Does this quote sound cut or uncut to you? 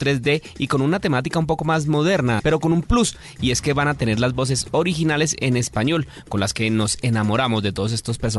cut